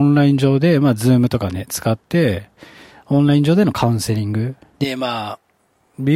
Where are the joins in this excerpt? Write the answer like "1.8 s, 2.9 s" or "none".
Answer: 4.7 s